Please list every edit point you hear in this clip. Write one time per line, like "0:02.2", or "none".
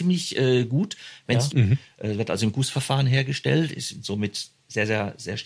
0:01.5